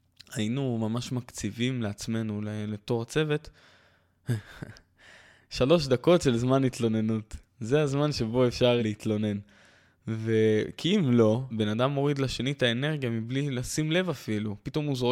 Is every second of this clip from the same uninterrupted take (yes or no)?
no